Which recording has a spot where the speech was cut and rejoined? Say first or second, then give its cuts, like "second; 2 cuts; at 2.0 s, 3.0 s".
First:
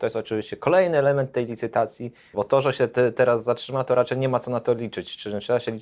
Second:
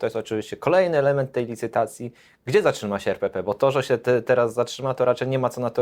first; 1 cut; at 2.3 s